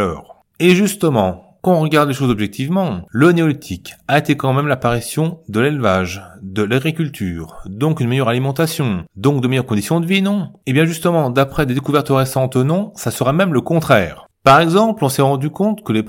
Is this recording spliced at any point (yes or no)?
no